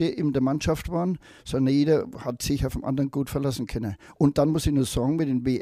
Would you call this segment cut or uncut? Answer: uncut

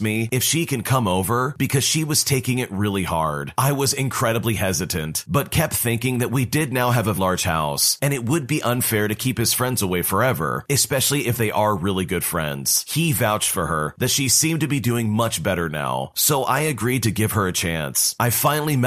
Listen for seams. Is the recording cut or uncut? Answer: cut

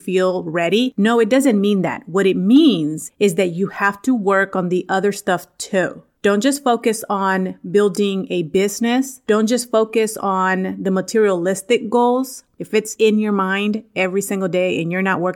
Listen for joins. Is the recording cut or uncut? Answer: cut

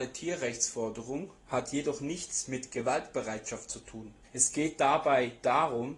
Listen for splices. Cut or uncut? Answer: cut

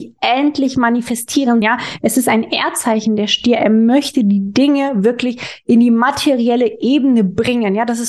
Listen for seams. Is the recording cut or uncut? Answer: cut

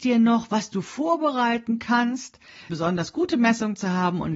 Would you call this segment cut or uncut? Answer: cut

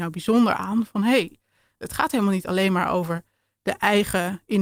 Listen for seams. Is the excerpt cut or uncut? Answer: uncut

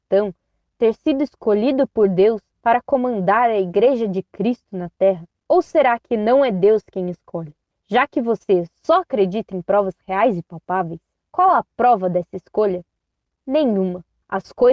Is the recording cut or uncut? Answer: uncut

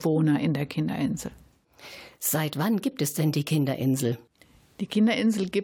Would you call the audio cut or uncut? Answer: uncut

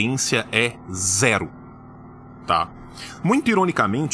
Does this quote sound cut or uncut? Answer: uncut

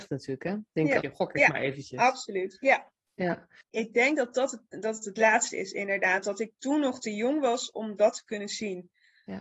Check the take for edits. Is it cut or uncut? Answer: cut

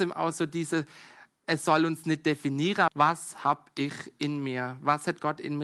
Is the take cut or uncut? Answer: cut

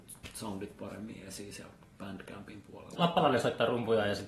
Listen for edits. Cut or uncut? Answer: cut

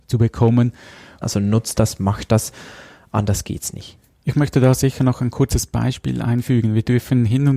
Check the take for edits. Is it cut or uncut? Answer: cut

